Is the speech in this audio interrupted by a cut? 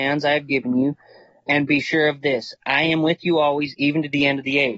no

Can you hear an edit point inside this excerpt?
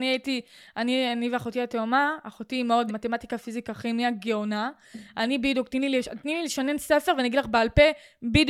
yes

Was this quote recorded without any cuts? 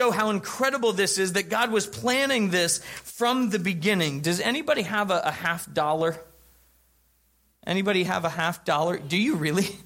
yes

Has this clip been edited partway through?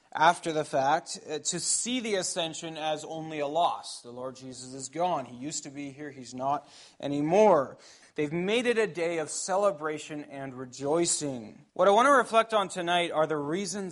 yes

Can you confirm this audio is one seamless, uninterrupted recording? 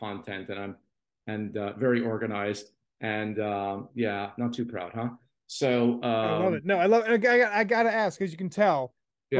yes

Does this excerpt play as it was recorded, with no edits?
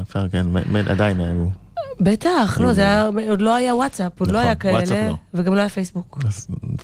yes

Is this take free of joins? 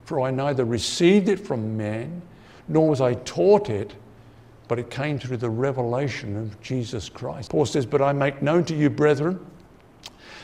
no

